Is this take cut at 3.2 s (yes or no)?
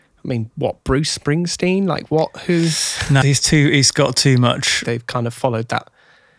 yes